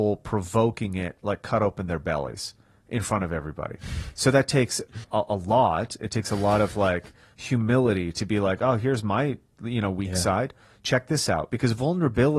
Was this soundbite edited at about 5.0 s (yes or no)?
yes